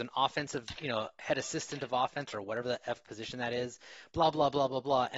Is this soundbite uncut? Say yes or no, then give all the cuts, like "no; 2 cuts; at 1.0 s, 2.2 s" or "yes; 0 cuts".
yes; 0 cuts